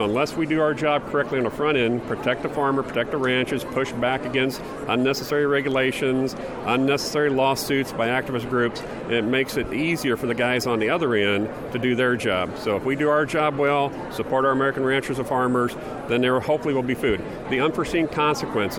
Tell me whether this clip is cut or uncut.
cut